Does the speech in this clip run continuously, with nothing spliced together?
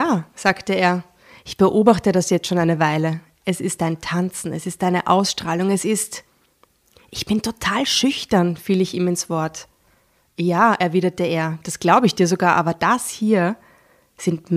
yes; 0 cuts

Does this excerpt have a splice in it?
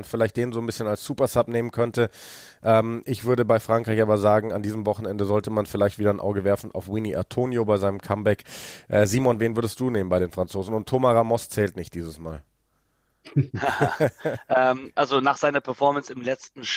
no; 0 cuts

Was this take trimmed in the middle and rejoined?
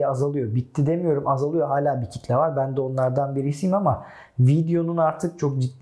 no; 0 cuts

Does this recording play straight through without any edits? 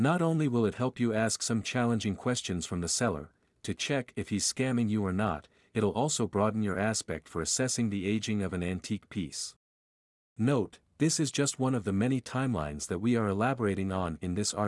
yes; 0 cuts

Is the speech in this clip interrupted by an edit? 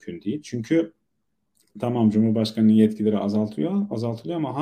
no; 0 cuts

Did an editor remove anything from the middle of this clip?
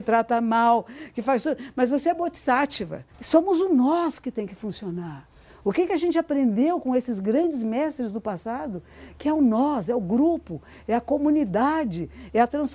yes; 1 cut; at 3.1 s

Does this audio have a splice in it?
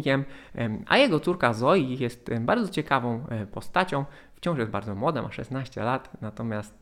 no; 0 cuts

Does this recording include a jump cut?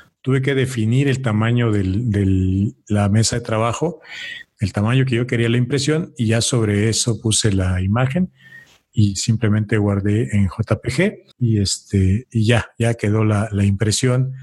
yes; 1 cut; at 11.3 s

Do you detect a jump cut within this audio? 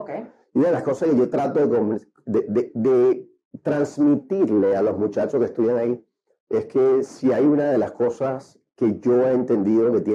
no; 0 cuts

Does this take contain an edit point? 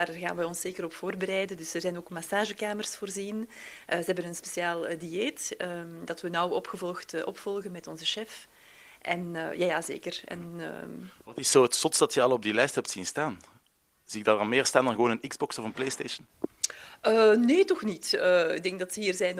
no; 0 cuts

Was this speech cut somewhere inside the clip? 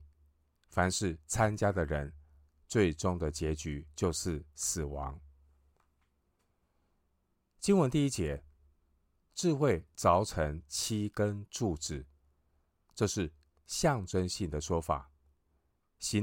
no; 0 cuts

